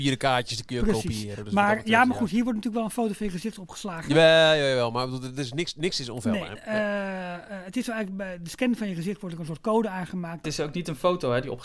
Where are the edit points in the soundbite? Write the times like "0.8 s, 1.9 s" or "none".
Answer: 6.6 s, 10.4 s